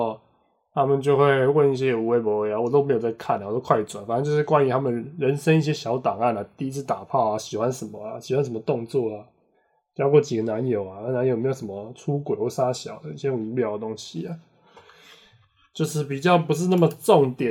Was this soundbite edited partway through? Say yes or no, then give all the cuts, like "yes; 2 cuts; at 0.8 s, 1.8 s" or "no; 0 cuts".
no; 0 cuts